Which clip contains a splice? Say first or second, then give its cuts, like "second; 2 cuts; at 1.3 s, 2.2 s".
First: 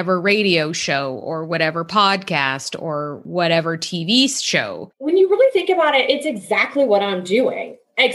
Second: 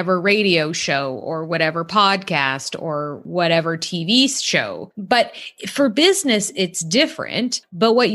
first; 1 cut; at 4.9 s